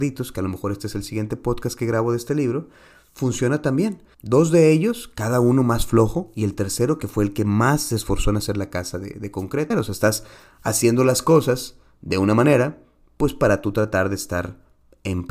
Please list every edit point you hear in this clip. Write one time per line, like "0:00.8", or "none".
0:04.1
0:09.7